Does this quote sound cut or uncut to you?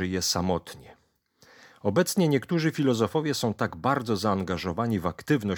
uncut